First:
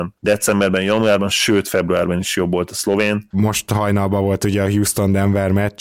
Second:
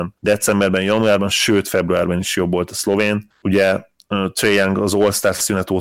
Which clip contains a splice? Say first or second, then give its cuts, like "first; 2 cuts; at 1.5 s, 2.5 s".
first; 1 cut; at 3.3 s